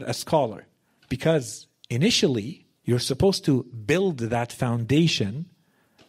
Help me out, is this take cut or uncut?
cut